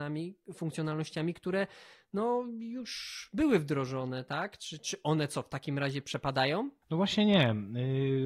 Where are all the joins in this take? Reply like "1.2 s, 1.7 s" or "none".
none